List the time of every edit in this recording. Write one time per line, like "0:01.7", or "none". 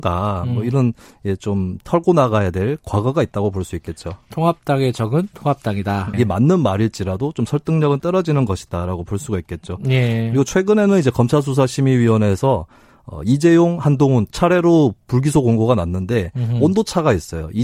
0:06.1